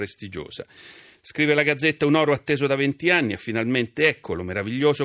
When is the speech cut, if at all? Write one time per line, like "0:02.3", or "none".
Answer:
none